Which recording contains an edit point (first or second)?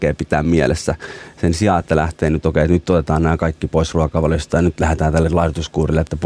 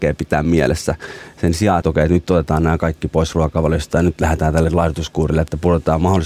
second